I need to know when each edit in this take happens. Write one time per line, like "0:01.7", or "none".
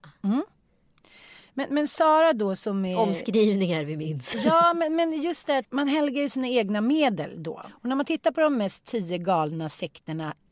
0:05.6